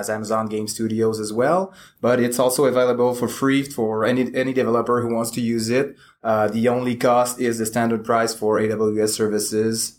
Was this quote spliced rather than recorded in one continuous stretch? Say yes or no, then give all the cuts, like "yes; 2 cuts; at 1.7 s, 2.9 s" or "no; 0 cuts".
no; 0 cuts